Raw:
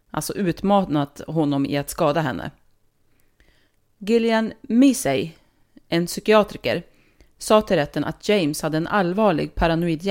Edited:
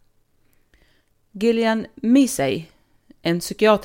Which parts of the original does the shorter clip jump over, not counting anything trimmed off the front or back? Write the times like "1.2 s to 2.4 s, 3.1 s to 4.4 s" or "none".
none